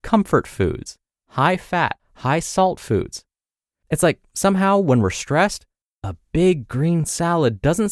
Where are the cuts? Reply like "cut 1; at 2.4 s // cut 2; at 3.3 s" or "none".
cut 1; at 2.0 s